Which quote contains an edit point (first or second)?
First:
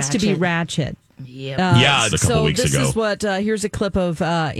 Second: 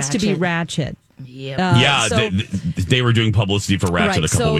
first